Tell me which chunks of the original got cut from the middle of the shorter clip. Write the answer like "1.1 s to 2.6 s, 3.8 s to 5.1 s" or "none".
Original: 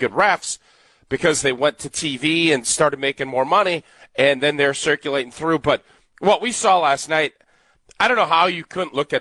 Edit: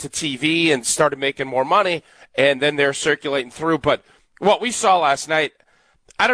none